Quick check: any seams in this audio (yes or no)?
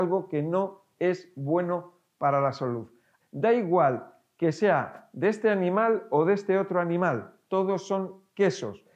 yes